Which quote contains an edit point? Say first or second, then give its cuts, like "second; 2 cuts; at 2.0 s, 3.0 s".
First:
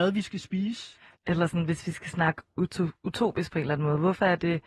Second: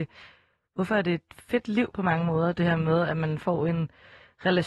first; 1 cut; at 1.1 s